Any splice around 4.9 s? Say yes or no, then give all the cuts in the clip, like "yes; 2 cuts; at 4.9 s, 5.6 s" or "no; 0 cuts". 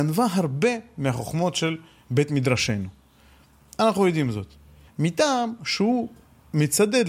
yes; 1 cut; at 4.9 s